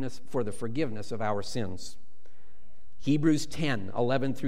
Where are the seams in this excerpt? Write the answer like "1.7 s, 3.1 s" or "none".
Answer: none